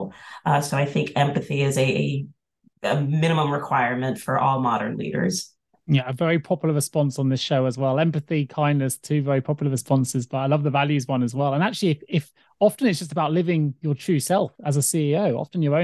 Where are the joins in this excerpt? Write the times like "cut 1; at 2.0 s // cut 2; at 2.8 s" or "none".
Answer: none

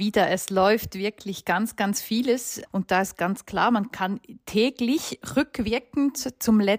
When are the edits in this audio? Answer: cut 1; at 2.7 s

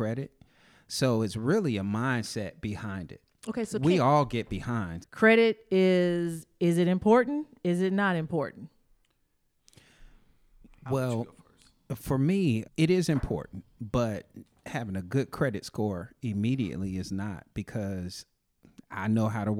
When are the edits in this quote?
cut 1; at 5.0 s // cut 2; at 12.6 s

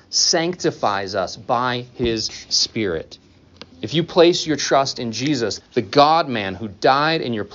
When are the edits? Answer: cut 1; at 3.7 s // cut 2; at 5.6 s

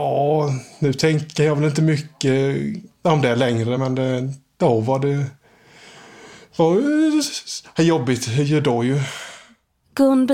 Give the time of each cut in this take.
none

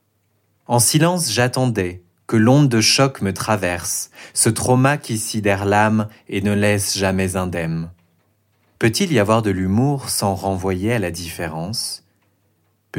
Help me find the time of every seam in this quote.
cut 1; at 8.8 s

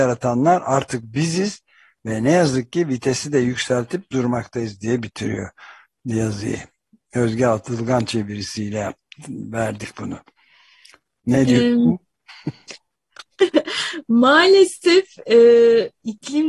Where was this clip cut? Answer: none

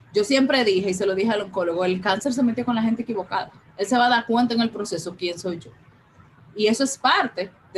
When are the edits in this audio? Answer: cut 1; at 3.6 s

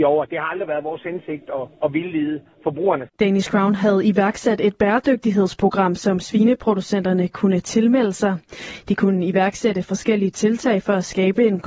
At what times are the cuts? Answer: cut 1; at 3.1 s

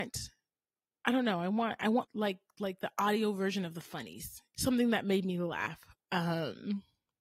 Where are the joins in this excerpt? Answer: cut 1; at 2.0 s // cut 2; at 4.5 s

